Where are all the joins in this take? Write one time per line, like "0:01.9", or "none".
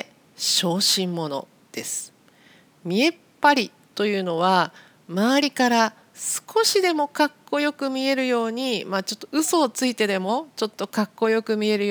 none